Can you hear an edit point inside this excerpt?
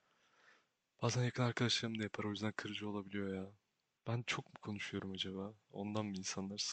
yes; 1 cut; at 4.0 s

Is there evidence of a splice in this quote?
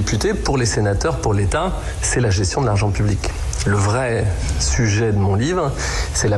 no; 0 cuts

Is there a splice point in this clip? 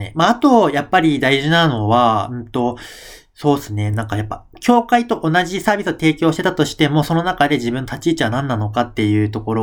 no; 0 cuts

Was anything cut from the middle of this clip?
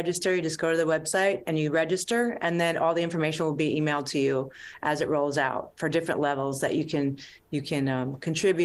no; 0 cuts

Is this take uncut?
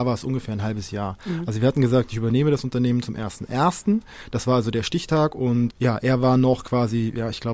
no; 1 cut; at 5.7 s

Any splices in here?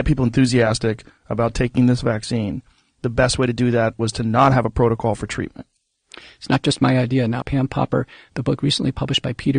yes; 1 cut; at 7.4 s

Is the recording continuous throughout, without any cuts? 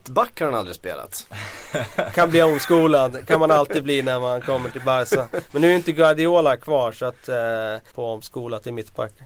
no; 1 cut; at 7.9 s

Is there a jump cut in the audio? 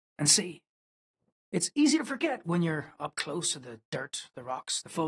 yes; 1 cut; at 1.4 s

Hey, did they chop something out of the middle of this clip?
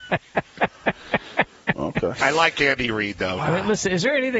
yes; 1 cut; at 3.4 s

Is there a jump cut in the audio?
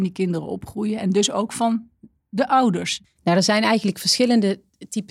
no; 0 cuts

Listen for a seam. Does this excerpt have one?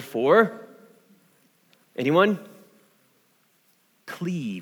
no; 0 cuts

